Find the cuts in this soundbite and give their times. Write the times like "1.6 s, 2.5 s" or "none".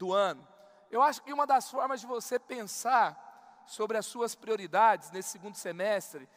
none